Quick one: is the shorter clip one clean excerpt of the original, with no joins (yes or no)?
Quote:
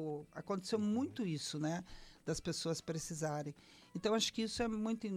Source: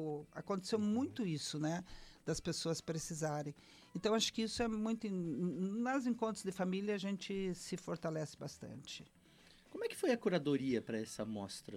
yes